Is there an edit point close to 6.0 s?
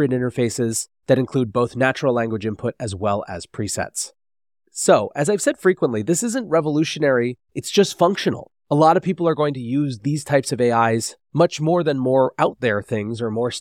no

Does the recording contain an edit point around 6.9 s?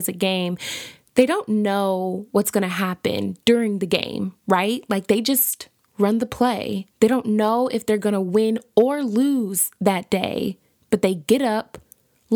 yes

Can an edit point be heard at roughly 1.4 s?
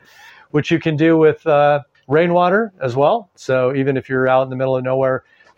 no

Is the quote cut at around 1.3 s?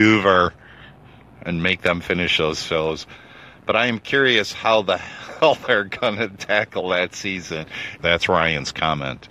no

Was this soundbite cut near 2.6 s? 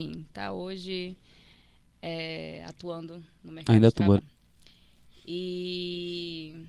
no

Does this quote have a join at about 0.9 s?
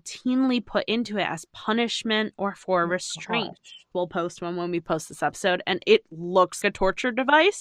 no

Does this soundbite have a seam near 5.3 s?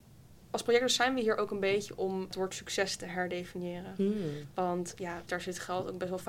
yes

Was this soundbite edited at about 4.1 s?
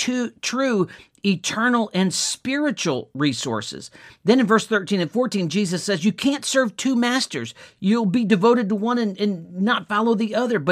no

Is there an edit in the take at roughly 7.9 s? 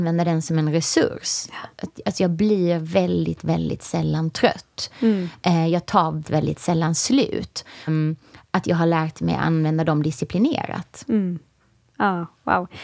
yes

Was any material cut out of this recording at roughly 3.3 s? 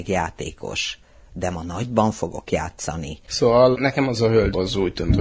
yes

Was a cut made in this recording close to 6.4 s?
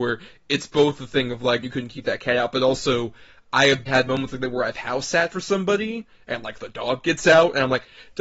no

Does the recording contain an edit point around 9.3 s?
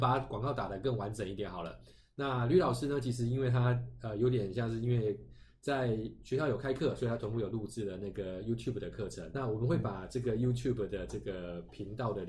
yes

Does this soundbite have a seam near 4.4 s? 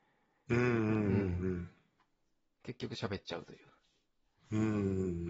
no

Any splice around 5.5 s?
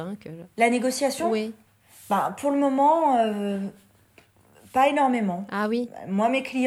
no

